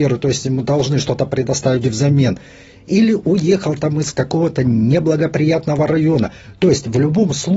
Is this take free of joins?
yes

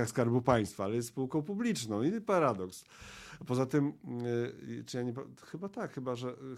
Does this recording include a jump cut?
no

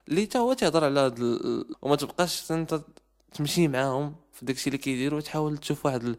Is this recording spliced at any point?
yes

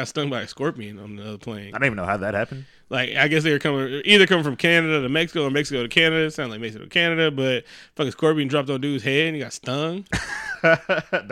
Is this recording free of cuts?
yes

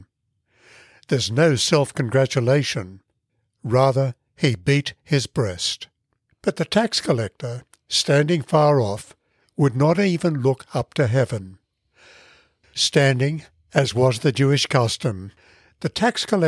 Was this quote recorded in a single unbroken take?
no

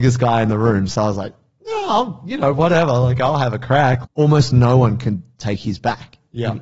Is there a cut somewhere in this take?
yes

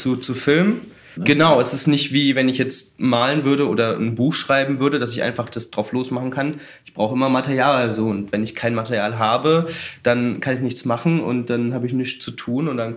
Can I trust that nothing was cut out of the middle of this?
no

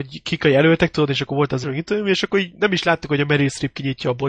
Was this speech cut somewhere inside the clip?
yes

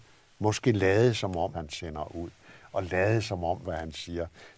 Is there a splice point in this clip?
yes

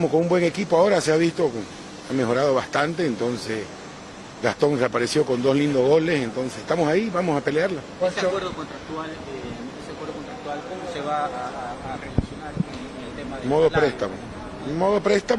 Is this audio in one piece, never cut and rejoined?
yes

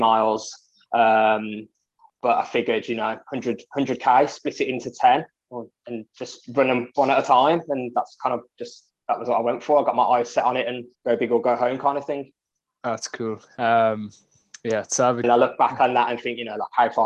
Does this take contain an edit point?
yes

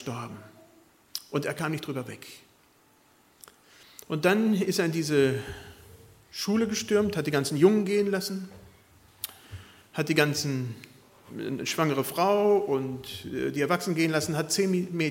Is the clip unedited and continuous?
no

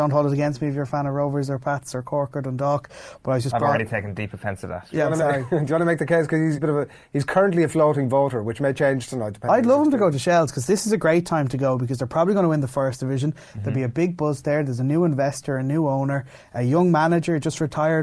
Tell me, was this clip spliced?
yes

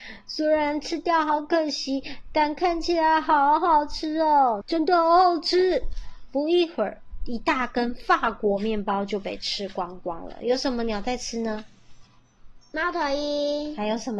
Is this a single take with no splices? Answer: no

